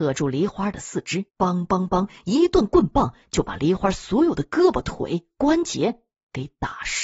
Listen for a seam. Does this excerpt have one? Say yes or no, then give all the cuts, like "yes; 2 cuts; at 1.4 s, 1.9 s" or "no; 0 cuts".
yes; 1 cut; at 1.3 s